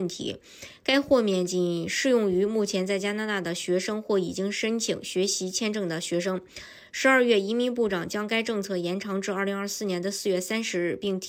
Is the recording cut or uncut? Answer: uncut